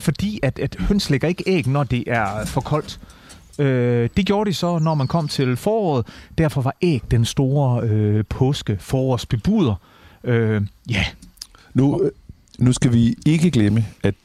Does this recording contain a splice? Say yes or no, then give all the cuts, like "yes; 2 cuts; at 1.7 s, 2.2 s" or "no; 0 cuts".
no; 0 cuts